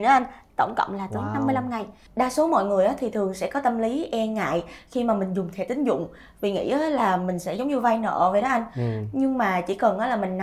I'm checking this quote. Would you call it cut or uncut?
uncut